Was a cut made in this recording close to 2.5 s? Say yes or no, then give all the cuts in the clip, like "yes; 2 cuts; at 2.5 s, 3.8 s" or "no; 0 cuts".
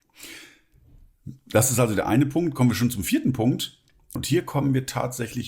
no; 1 cut; at 4.2 s